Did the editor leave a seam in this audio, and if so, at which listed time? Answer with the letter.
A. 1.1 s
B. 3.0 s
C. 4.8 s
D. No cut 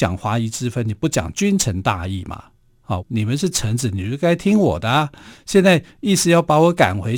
B